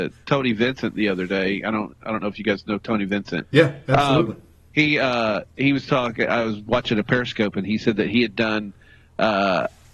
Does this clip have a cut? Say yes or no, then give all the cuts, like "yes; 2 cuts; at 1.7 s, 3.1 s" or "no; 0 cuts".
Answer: no; 0 cuts